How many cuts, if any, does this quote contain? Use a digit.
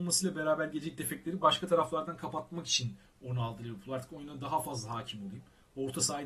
0